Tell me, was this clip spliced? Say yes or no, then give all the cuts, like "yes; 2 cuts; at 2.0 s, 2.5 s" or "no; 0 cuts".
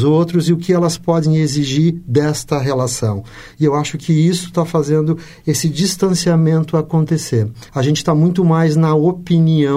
yes; 2 cuts; at 3.5 s, 7.7 s